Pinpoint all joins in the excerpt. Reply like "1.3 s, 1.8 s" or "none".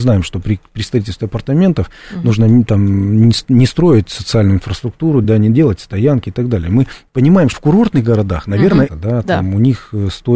5.2 s, 7.5 s, 8.9 s